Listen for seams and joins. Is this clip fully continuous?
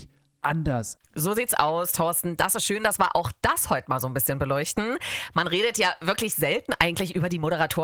no; 1 cut; at 1.0 s

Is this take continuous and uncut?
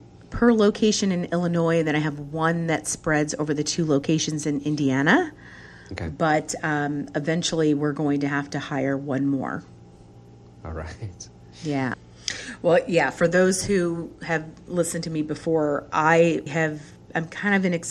no; 2 cuts; at 11.9 s, 16.5 s

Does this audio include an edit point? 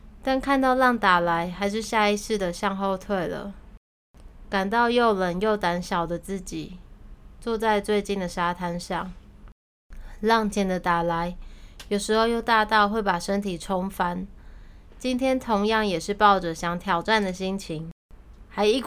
yes; 2 cuts; at 10.5 s, 14.9 s

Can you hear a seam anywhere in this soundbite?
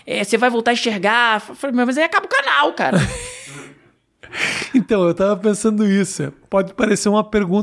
no; 0 cuts

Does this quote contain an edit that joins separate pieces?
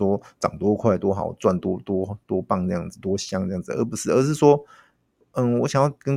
no; 0 cuts

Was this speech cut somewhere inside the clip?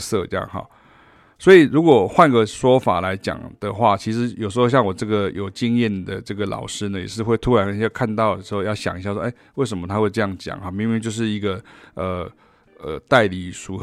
no; 0 cuts

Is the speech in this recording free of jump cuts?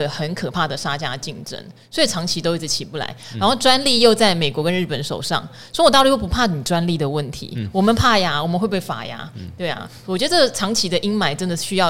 yes; 0 cuts

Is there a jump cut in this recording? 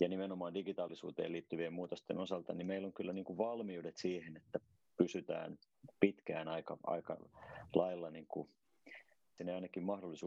yes; 1 cut; at 9.4 s

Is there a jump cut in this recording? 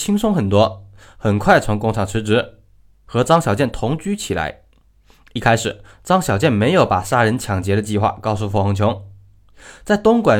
no; 0 cuts

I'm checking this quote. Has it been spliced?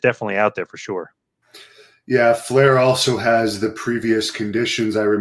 no; 0 cuts

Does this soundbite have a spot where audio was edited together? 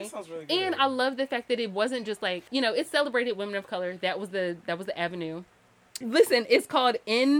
yes; 2 cuts; at 2.5 s, 6.0 s

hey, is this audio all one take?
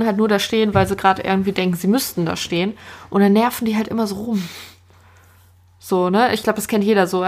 yes; 0 cuts

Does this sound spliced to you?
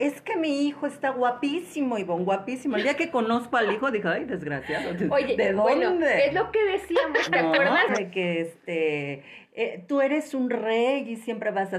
yes; 1 cut; at 7.9 s

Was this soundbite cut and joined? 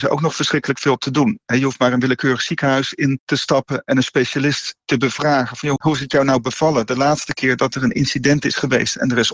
no; 0 cuts

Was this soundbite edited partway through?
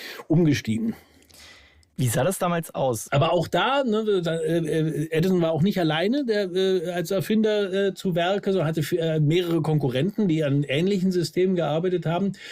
yes; 1 cut; at 3.1 s

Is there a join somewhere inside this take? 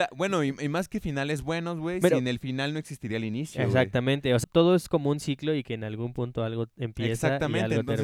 yes; 1 cut; at 4.4 s

